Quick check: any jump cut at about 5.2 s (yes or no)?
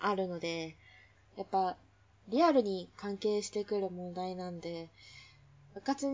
no